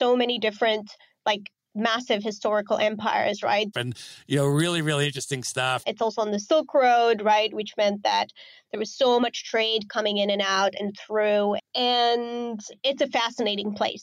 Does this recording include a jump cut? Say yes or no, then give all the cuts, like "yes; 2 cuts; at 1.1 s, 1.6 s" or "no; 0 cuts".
yes; 3 cuts; at 3.7 s, 5.8 s, 11.6 s